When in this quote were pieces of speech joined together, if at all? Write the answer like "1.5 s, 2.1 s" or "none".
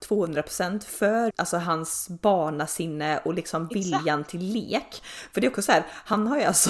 1.3 s